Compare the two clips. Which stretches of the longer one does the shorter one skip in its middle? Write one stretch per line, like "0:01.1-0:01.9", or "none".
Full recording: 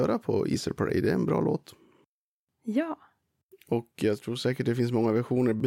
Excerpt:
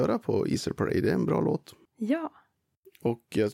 0:01.9-0:02.5